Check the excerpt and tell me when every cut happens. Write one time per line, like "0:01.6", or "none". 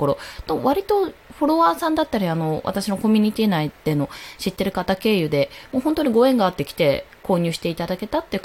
none